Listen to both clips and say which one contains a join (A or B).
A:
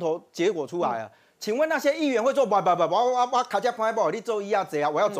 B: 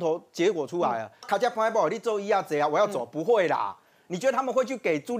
B